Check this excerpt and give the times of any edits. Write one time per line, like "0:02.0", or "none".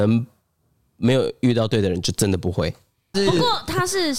0:03.1